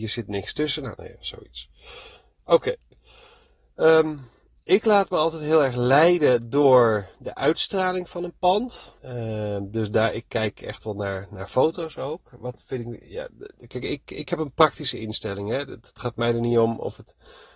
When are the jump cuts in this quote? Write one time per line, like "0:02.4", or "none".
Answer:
0:01.0
0:09.0